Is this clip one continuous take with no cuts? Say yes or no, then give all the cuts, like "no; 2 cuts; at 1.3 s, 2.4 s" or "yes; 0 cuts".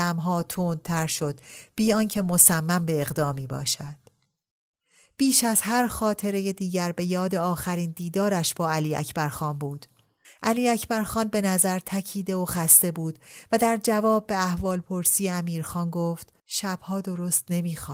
no; 2 cuts; at 10.2 s, 16.4 s